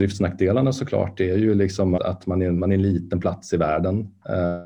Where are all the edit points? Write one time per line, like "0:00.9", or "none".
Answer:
0:02.0